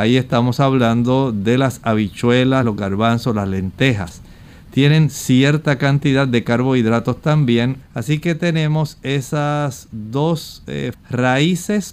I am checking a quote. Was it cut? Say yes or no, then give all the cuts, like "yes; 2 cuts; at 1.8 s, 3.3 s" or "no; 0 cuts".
yes; 3 cuts; at 2.6 s, 7.8 s, 10.9 s